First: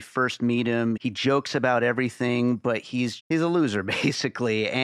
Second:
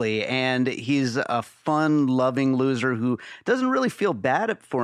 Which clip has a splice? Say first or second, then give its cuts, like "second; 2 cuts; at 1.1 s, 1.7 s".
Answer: first; 2 cuts; at 1.0 s, 3.2 s